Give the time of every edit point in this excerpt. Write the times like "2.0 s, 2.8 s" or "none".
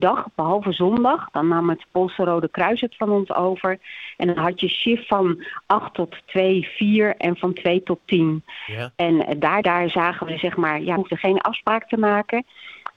9.6 s, 11.0 s